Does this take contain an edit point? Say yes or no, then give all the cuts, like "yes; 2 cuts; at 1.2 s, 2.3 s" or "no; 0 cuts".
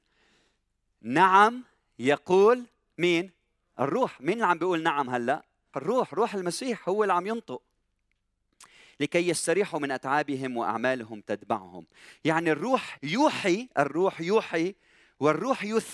yes; 2 cuts; at 5.7 s, 13.0 s